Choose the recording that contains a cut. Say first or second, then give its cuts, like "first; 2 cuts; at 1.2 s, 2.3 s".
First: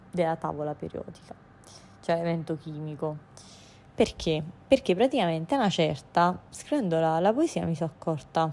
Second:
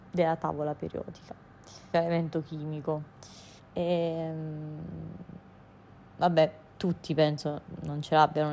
second; 2 cuts; at 1.9 s, 3.6 s